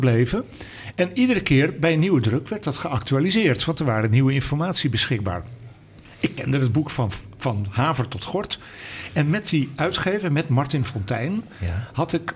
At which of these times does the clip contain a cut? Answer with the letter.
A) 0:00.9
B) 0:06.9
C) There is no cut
C